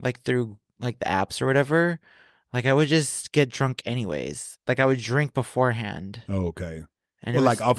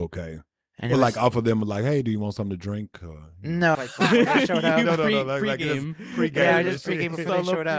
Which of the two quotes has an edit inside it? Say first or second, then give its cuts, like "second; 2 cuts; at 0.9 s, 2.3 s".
second; 1 cut; at 3.7 s